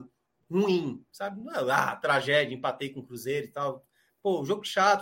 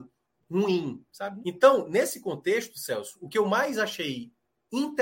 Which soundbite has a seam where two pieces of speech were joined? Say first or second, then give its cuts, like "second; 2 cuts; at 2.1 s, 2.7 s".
second; 1 cut; at 1.4 s